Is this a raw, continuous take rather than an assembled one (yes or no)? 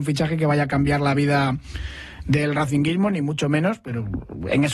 yes